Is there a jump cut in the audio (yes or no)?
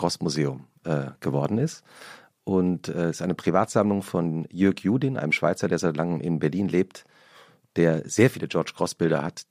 no